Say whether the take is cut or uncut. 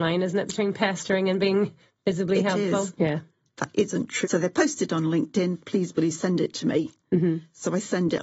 cut